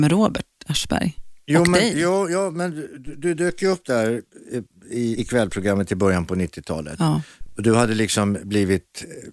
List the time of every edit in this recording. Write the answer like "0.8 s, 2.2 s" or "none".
5.1 s